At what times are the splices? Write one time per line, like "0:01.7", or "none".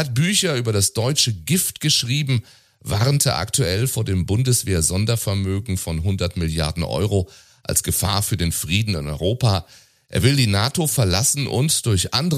none